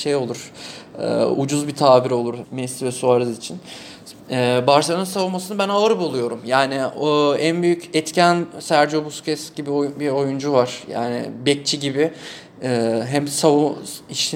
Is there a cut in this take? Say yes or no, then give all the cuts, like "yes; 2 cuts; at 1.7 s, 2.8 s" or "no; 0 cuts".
yes; 1 cut; at 2.4 s